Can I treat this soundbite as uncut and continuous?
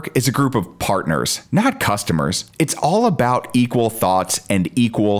yes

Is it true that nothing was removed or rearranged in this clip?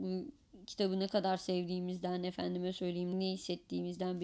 no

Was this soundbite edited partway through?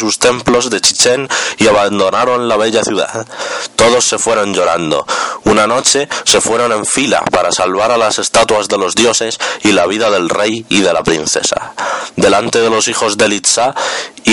yes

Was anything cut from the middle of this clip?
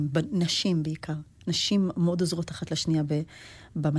no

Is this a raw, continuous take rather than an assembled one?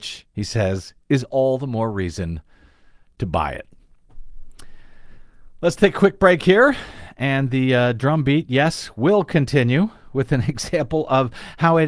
yes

